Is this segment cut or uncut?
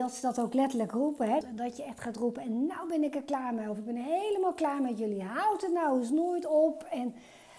cut